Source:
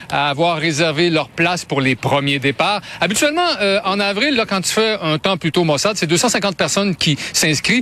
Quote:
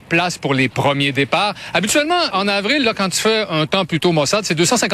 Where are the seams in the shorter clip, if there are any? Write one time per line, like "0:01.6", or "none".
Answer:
0:02.3

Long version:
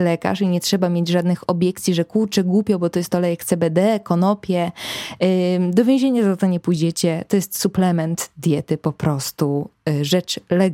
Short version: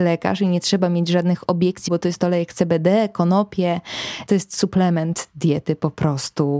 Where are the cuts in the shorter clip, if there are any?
0:01.9
0:04.3

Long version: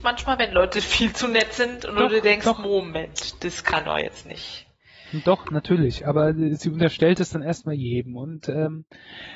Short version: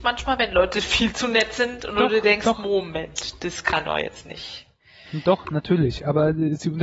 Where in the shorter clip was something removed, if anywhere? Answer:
none

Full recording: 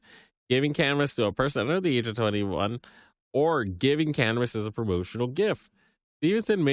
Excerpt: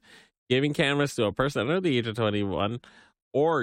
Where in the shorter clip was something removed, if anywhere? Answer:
none

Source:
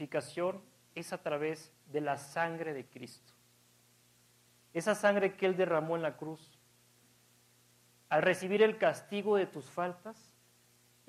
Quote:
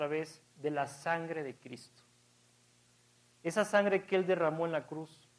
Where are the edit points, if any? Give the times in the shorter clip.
none

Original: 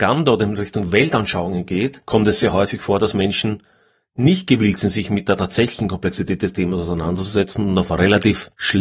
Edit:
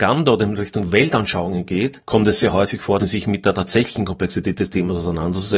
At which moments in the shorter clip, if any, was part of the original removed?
0:03.0

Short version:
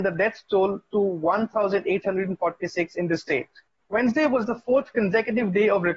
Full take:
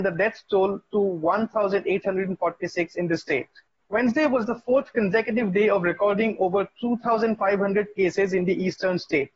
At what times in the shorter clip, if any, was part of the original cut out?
none

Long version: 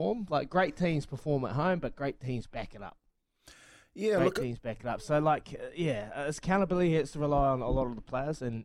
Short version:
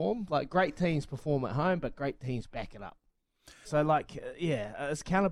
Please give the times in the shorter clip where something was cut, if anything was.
0:03.6

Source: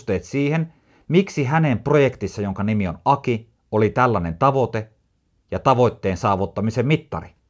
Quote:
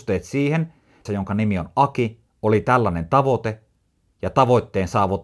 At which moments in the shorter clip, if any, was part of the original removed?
0:01.1

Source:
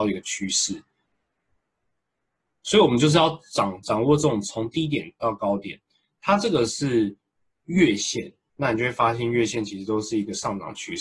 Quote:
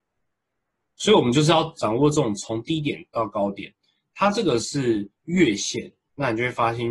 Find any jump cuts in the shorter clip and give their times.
0:01.8
0:05.2

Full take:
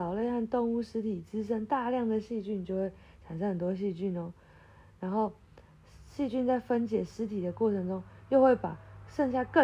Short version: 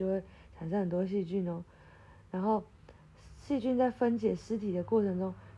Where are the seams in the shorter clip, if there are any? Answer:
none

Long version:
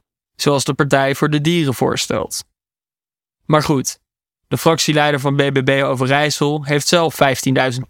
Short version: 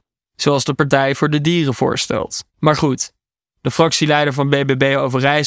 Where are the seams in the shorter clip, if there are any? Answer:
0:02.5

